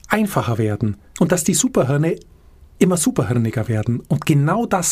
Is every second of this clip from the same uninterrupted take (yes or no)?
no